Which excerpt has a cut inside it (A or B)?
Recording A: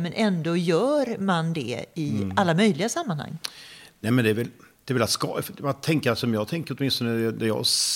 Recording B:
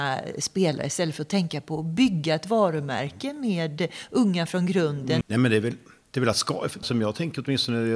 B